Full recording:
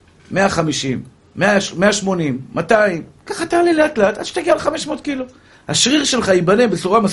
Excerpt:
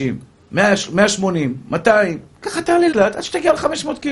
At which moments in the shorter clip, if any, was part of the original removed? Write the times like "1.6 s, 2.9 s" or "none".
2.9 s